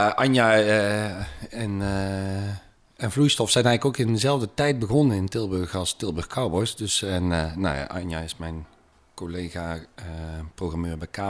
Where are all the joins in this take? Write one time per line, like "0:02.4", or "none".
none